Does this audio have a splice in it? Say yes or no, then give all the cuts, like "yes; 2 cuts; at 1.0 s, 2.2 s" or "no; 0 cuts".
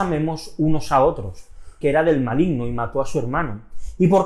yes; 1 cut; at 1.8 s